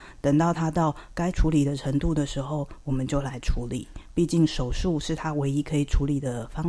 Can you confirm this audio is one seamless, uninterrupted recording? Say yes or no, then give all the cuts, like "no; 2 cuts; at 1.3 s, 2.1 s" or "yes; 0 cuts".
no; 1 cut; at 1.3 s